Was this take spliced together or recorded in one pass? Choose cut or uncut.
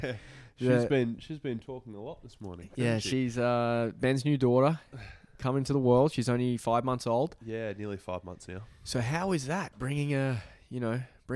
uncut